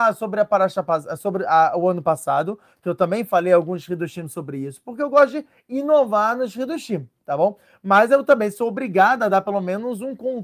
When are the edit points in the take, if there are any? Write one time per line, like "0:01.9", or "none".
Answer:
none